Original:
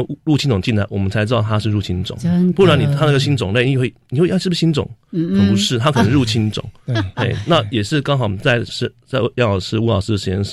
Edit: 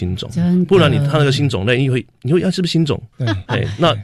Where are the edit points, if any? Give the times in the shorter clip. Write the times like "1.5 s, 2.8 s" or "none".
3.1 s